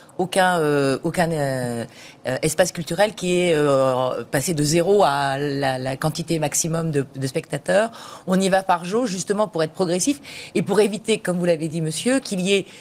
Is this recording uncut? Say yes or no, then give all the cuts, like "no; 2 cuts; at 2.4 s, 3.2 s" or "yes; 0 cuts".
yes; 0 cuts